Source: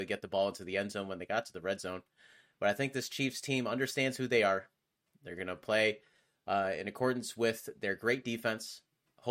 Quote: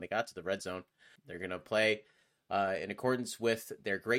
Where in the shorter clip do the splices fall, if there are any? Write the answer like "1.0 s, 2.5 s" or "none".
1.2 s

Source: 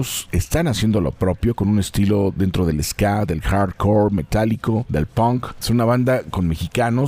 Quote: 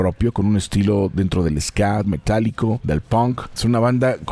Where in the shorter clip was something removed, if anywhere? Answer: 2.0 s

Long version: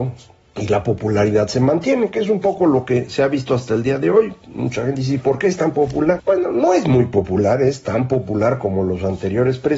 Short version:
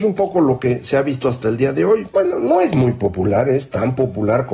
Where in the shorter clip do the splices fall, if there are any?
2.1 s

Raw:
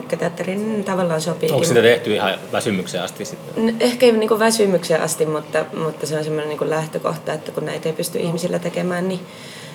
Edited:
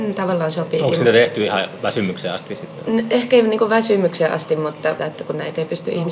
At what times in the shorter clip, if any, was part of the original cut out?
5.0 s

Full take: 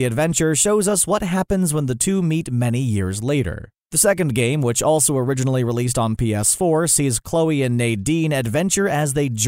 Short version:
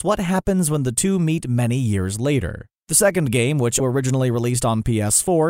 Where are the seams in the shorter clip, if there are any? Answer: 3.8 s

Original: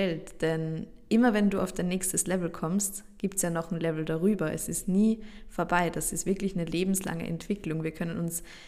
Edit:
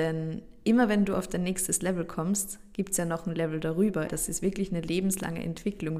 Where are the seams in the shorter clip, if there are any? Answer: 4.1 s

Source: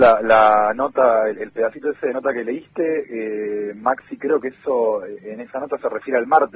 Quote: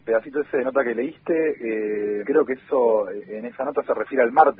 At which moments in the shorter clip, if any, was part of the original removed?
2.2 s

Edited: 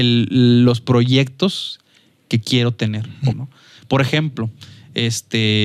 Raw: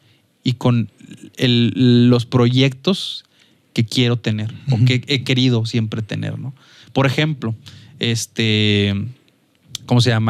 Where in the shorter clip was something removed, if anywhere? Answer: 3.3 s

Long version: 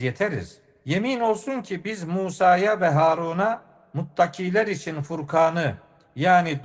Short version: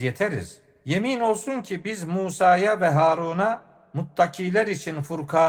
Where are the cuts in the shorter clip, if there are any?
none

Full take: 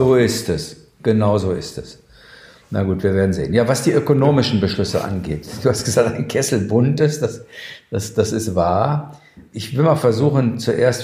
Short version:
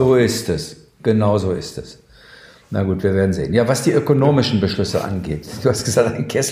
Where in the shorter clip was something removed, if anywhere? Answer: none

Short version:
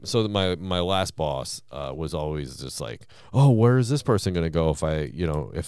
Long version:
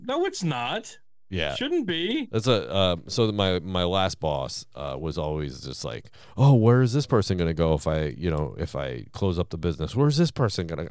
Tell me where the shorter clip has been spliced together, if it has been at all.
none

